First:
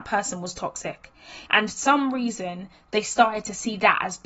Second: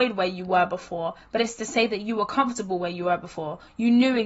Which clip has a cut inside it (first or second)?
first